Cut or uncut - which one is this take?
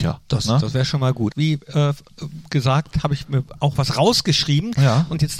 cut